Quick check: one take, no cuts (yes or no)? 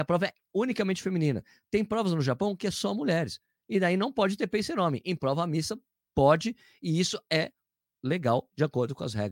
yes